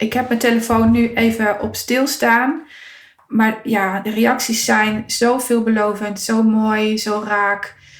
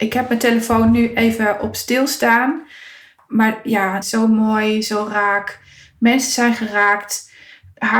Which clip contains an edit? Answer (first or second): second